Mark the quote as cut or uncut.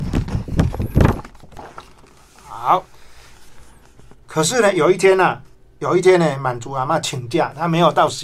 uncut